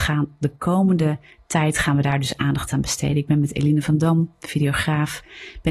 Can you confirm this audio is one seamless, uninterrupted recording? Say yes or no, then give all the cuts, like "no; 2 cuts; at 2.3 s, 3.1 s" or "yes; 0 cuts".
yes; 0 cuts